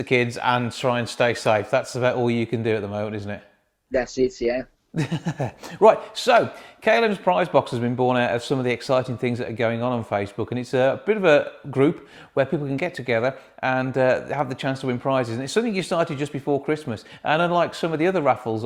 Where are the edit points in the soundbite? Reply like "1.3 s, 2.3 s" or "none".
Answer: none